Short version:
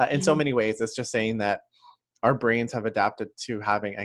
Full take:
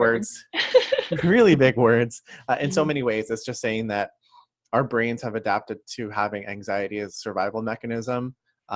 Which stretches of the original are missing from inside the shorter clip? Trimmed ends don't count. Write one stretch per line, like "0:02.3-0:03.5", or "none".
none

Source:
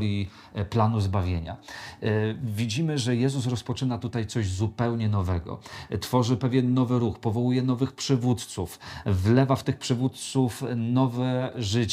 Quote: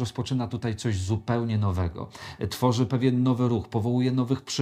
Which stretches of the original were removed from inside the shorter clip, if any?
none

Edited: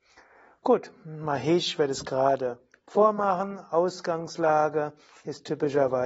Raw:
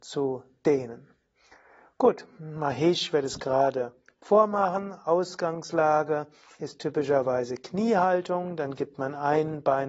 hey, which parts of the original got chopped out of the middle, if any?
none

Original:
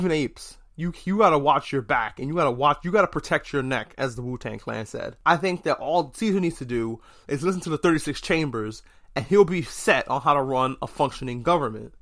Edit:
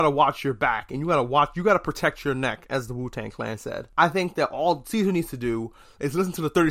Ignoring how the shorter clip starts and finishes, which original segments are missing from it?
none

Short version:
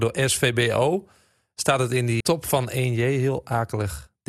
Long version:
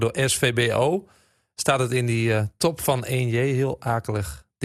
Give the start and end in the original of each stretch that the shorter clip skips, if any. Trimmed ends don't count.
0:02.2-0:02.6

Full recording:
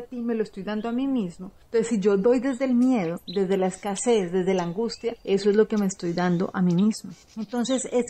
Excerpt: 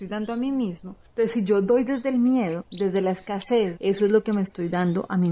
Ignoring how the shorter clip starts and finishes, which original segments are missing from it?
0:04.3-0:05.2

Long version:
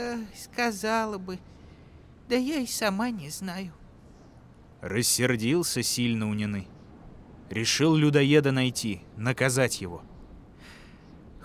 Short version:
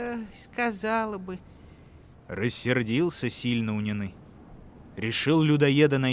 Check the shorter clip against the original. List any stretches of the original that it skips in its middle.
0:02.1-0:04.7

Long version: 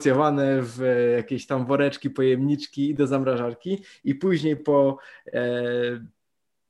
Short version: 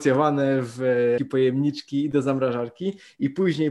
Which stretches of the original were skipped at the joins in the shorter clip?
0:01.2-0:02.0

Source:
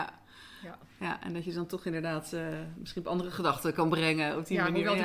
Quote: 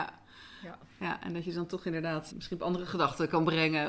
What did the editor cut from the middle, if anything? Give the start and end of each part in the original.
0:02.3-0:02.8

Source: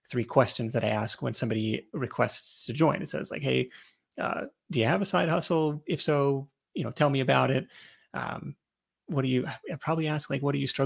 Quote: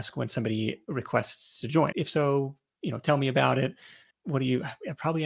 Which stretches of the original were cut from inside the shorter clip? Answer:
0:03.0-0:05.8
0:08.0-0:08.9

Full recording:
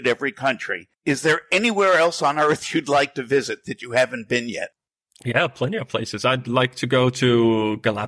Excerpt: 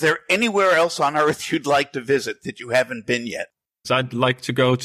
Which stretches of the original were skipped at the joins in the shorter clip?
0:05.1-0:06.2

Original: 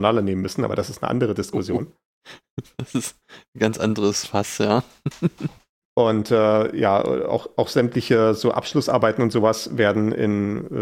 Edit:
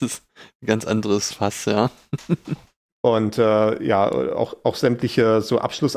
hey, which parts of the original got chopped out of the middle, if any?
none

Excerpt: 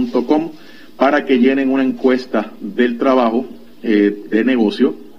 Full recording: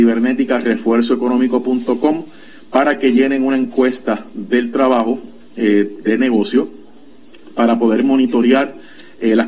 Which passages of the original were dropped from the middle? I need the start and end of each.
none

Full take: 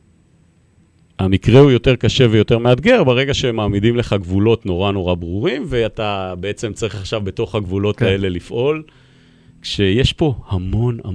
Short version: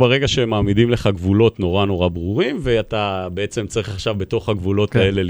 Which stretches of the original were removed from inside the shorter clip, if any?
none

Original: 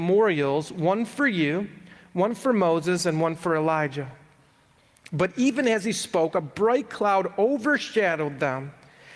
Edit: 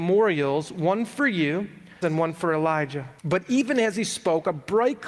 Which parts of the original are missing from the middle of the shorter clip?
0:02.0-0:03.0
0:04.2-0:05.1

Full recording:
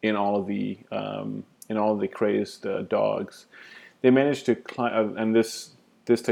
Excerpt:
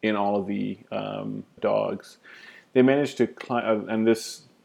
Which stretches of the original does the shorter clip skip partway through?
0:01.6-0:02.9

